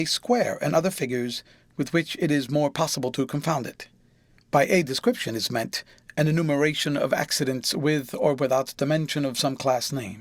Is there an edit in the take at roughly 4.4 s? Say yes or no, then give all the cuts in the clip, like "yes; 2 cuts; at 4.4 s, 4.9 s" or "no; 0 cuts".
yes; 1 cut; at 4.4 s